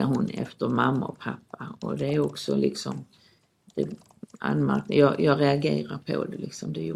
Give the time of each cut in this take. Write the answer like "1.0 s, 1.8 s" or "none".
none